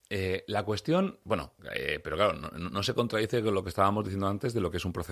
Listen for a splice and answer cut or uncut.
uncut